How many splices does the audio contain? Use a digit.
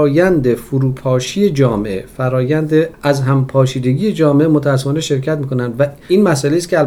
1